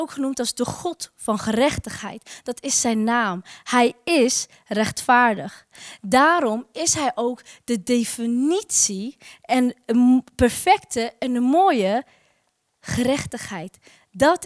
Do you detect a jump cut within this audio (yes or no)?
no